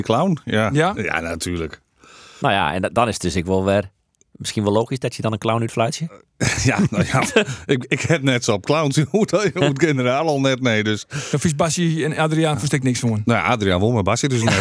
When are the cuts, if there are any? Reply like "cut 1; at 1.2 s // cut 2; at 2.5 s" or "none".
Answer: cut 1; at 1.0 s

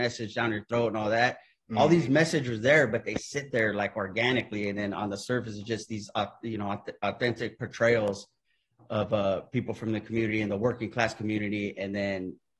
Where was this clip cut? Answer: none

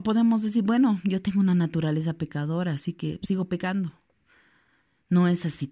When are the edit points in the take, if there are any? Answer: none

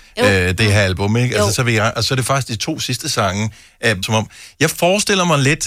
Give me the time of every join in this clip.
cut 1; at 4.0 s

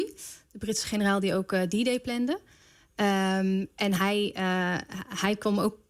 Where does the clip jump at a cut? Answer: none

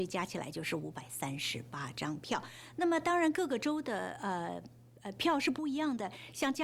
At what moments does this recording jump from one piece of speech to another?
none

